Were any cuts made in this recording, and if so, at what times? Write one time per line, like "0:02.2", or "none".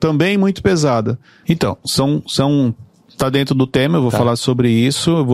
0:01.4